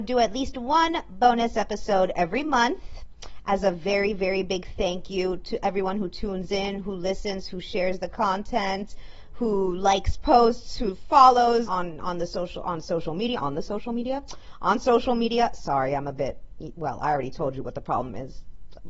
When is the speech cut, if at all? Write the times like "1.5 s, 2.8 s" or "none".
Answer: 11.7 s